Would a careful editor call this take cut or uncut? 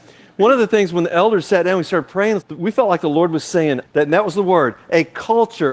cut